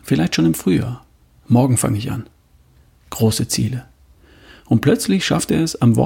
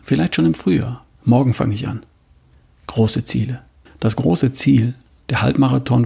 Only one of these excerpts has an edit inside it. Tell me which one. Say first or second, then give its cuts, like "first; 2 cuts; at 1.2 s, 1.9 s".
second; 2 cuts; at 1.1 s, 3.9 s